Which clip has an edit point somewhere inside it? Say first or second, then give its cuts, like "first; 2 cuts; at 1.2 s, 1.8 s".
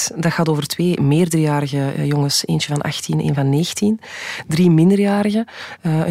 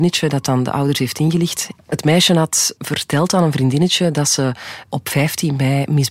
second; 1 cut; at 1.7 s